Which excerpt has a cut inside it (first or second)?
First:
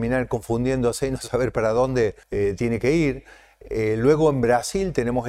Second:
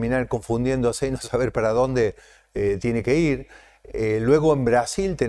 first